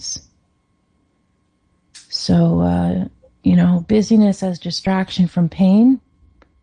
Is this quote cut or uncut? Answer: uncut